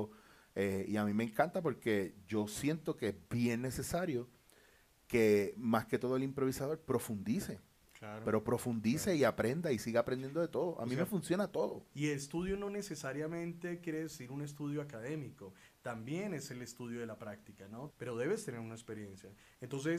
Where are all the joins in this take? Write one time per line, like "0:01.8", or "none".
0:11.9
0:17.9